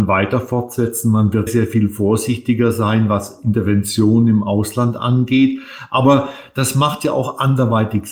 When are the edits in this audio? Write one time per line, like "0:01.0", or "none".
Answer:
0:01.5

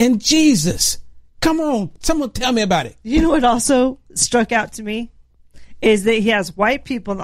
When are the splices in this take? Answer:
0:02.0

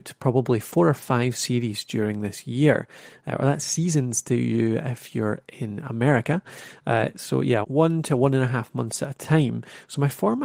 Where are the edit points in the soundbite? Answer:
0:07.6

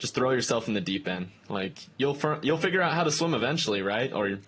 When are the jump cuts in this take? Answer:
none

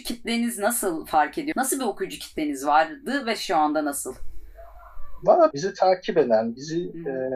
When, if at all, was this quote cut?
0:01.5
0:05.5

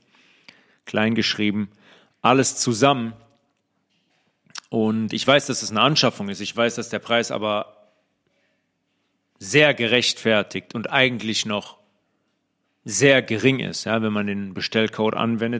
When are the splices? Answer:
none

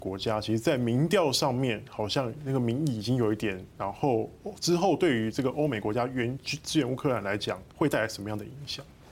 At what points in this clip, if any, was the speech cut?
0:03.7
0:07.7

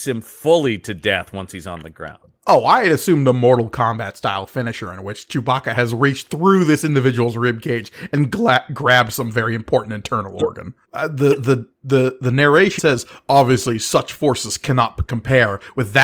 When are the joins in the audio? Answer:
0:10.8
0:12.8

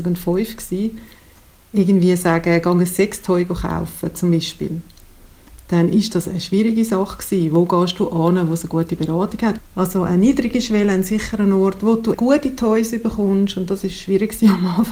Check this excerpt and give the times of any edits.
0:09.6
0:12.1

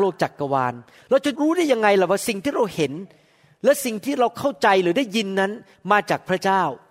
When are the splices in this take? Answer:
0:01.3

